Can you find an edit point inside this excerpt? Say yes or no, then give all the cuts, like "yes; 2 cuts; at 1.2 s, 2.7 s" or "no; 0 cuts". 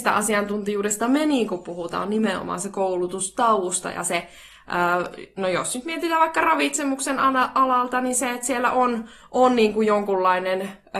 no; 0 cuts